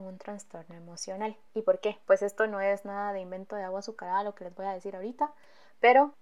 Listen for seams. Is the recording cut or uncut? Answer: uncut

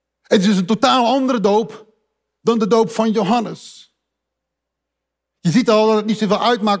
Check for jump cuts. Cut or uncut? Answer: uncut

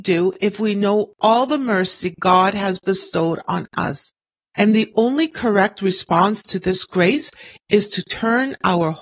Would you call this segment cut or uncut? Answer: cut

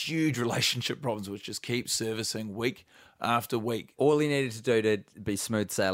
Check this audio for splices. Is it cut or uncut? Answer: cut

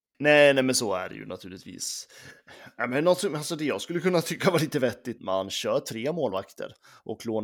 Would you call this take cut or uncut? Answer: cut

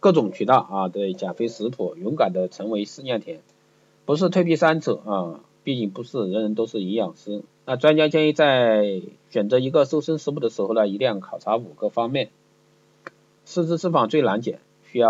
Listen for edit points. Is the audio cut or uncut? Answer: cut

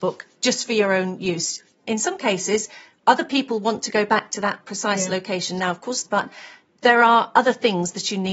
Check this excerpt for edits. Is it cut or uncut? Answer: cut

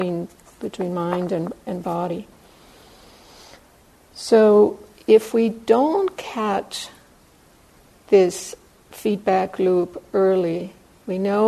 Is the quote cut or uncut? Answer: uncut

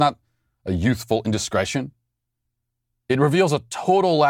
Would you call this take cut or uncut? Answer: uncut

